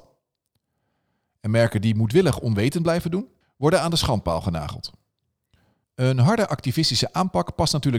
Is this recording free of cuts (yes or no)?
no